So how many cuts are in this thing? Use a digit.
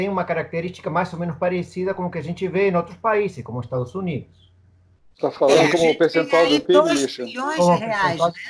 0